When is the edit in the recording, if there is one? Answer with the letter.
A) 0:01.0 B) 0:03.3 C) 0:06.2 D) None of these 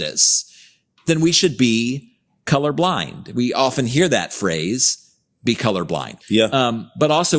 C